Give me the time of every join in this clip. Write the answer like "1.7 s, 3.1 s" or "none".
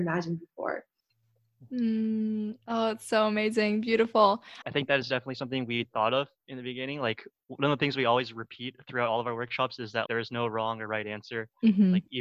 4.6 s, 10.1 s